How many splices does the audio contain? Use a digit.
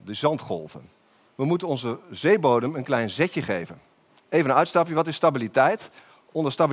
2